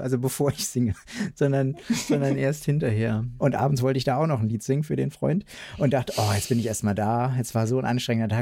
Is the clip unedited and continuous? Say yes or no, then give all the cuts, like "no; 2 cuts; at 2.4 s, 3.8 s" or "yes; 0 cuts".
no; 1 cut; at 3.4 s